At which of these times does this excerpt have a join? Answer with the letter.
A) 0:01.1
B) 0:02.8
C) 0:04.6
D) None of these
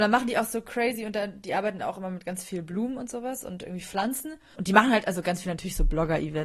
C